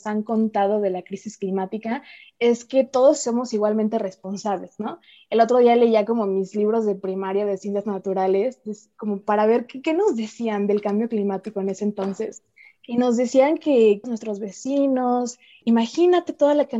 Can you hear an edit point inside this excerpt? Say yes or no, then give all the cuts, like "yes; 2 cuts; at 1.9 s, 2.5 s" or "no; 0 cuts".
yes; 2 cuts; at 14.0 s, 15.6 s